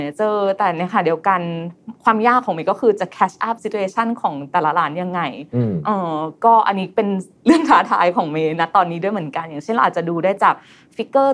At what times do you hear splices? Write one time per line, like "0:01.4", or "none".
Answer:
none